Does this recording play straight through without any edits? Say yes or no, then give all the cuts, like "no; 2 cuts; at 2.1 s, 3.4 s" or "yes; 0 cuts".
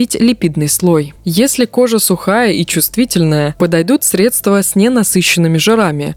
yes; 0 cuts